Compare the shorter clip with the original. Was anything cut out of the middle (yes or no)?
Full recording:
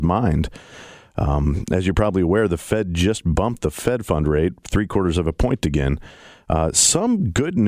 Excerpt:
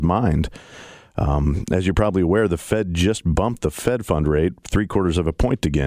no